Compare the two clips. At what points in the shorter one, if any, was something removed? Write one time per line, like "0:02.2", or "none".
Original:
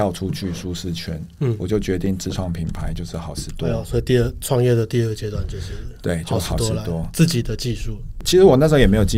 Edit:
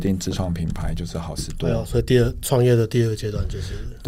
none